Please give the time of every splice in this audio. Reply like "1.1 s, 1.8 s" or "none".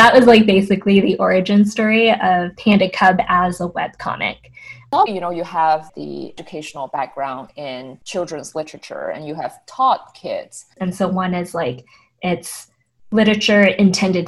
5.1 s, 10.8 s